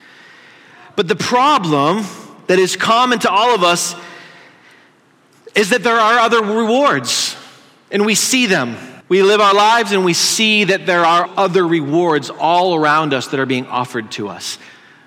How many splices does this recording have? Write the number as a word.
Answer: two